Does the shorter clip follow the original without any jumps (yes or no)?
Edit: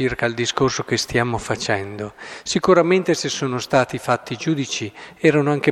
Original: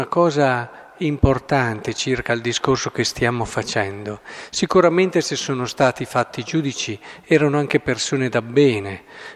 yes